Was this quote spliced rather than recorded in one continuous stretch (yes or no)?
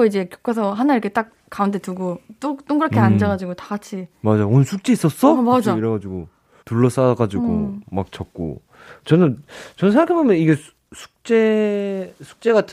yes